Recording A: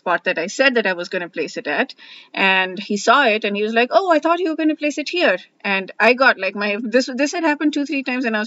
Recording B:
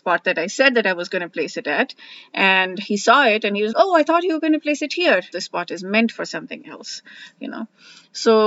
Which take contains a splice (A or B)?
B